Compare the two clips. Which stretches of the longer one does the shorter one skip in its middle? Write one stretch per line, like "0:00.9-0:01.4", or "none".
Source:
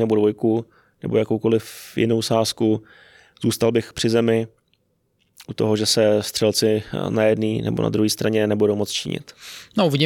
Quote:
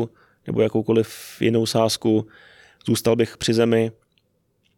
none